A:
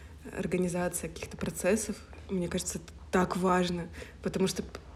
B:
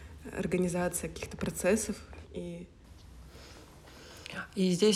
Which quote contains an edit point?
B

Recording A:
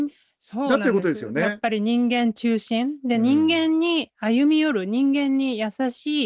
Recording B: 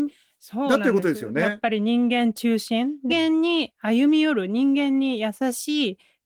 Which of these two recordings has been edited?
B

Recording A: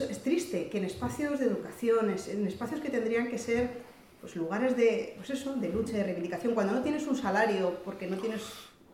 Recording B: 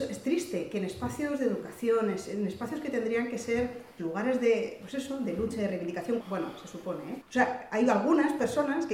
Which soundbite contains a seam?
B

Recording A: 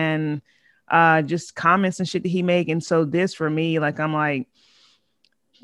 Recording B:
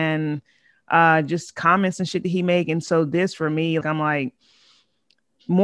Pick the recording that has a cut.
B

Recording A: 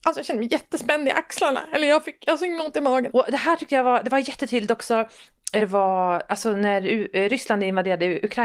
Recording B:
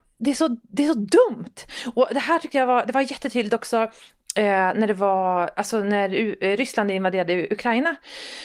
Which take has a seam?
A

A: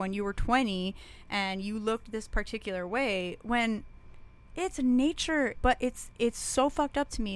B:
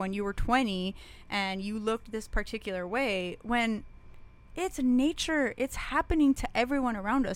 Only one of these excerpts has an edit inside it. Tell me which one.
A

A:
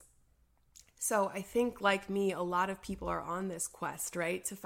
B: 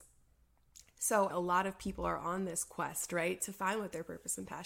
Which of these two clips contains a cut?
B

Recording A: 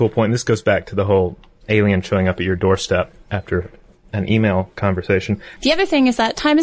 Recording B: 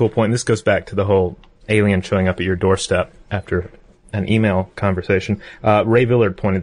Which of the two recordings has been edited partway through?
A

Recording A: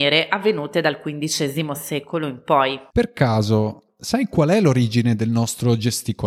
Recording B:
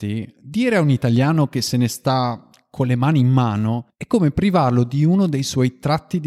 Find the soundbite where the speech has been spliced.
A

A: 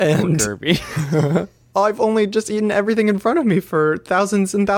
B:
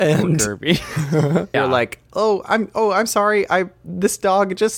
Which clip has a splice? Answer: B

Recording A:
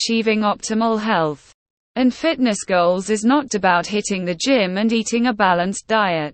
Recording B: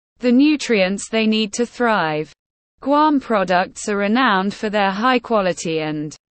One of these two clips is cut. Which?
A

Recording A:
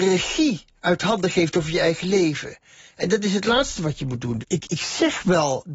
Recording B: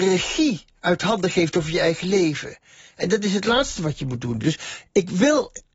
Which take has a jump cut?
A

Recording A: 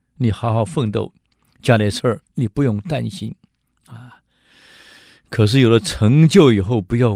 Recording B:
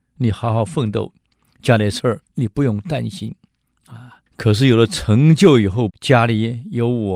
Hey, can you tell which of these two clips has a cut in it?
B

